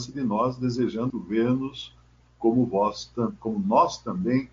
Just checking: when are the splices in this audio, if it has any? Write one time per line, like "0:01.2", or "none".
0:01.1